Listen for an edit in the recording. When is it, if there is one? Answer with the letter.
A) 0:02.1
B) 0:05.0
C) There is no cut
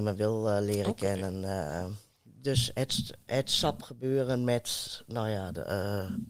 C